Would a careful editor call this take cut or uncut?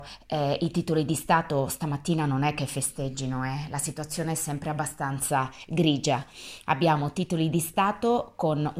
uncut